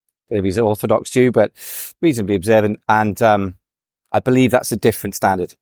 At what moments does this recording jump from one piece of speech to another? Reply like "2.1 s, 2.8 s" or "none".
none